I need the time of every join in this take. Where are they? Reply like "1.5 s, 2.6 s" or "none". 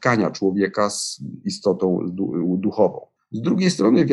3.2 s

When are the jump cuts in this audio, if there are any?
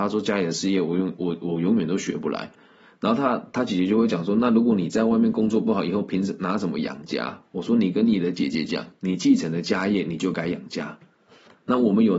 2.6 s

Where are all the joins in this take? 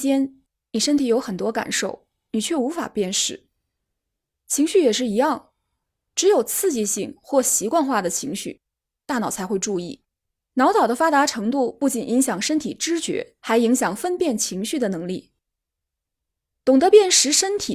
10.4 s, 13.4 s

